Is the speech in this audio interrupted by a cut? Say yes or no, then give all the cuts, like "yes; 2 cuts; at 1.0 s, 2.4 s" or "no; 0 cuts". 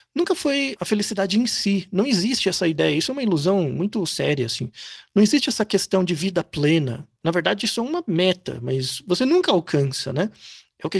no; 0 cuts